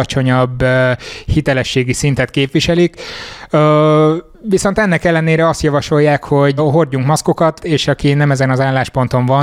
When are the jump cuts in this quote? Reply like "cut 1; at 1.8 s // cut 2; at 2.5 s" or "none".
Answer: cut 1; at 6.6 s // cut 2; at 7.6 s